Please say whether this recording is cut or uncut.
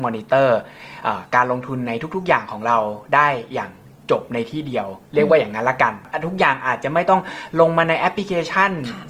uncut